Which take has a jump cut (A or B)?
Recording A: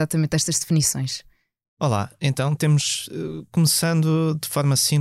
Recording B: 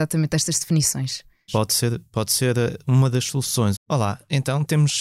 B